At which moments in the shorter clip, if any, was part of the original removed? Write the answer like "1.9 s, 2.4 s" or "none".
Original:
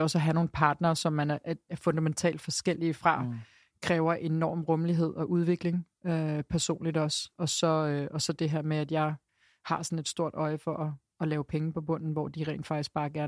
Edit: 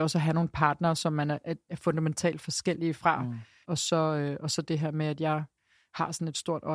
3.6 s